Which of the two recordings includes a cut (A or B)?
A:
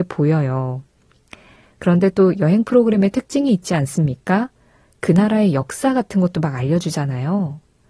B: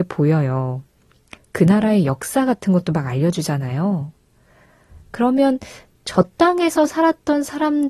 B